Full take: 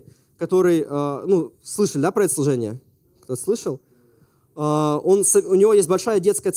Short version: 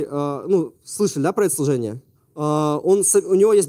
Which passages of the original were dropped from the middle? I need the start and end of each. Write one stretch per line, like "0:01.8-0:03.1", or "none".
0:02.9-0:04.4